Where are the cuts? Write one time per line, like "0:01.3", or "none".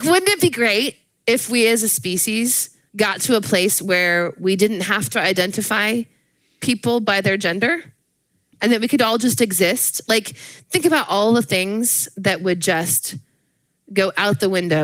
0:02.9